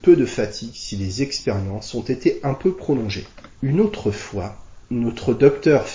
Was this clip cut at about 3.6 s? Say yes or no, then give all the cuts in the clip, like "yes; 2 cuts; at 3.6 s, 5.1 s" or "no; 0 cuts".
yes; 1 cut; at 3.6 s